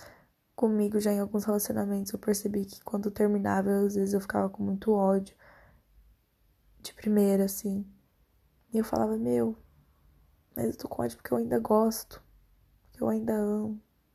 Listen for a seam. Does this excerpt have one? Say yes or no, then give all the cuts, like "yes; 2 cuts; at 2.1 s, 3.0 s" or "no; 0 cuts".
no; 0 cuts